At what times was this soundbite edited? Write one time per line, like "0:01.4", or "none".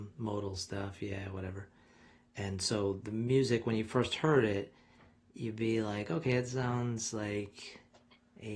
0:02.2